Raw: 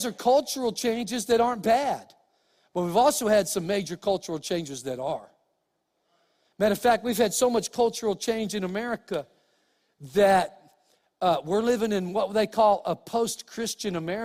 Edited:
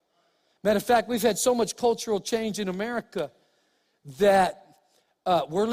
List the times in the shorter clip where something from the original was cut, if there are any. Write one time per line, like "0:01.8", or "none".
none

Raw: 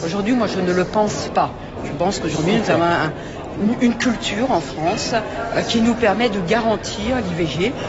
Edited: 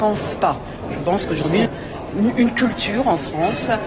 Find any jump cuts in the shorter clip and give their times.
0:01.7

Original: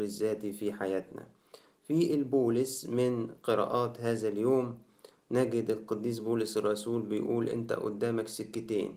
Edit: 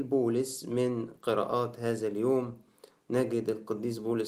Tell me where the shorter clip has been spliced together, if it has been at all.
none

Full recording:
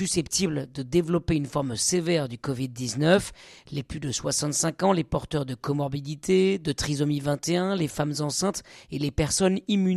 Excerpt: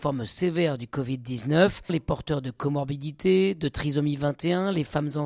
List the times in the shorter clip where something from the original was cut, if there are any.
0:01.9

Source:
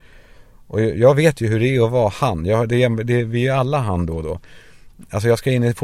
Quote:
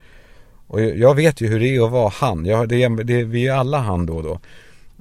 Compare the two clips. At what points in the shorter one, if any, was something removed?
none

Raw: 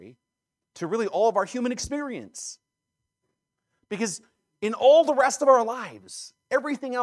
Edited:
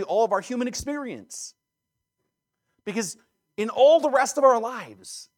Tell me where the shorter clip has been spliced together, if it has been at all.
none

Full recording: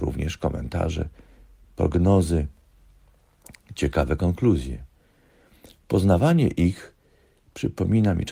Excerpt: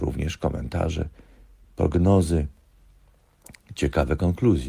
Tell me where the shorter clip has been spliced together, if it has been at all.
none

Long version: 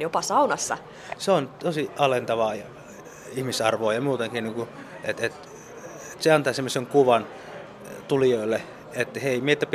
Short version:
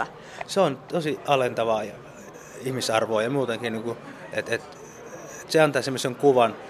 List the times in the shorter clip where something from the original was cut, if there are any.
none

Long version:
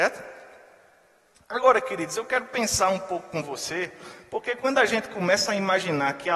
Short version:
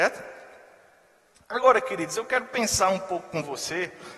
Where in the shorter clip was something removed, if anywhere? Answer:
none

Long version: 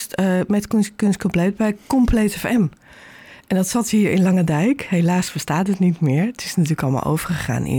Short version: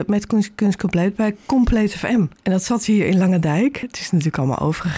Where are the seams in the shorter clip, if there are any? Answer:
0:02.4
0:03.8

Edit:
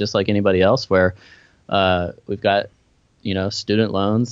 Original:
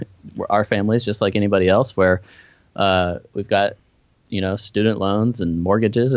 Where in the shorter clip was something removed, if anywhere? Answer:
none

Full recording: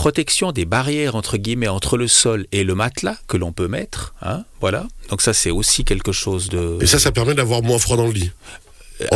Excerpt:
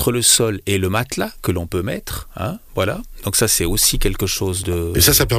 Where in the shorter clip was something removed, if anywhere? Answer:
none

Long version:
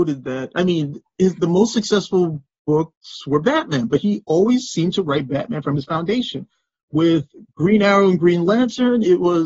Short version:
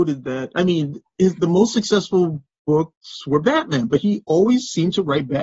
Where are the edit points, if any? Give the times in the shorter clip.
none

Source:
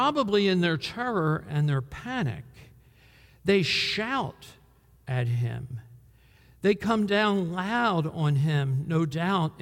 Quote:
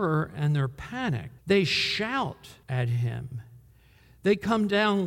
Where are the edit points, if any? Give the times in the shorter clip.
0:01.4
0:02.6

